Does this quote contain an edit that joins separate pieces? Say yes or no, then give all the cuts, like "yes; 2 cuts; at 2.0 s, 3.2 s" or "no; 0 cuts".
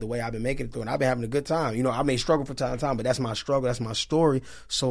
no; 0 cuts